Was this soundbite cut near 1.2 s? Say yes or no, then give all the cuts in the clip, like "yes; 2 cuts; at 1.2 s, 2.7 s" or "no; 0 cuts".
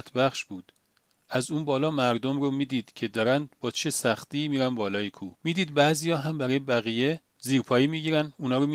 no; 2 cuts; at 5.3 s, 7.3 s